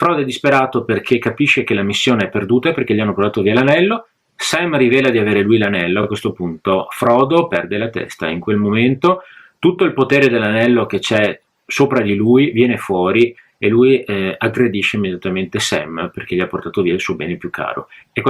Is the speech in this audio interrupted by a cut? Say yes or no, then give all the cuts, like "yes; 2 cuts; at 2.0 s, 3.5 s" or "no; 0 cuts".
no; 0 cuts